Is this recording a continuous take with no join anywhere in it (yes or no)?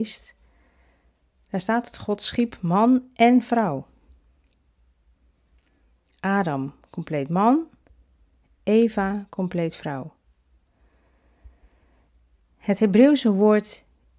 yes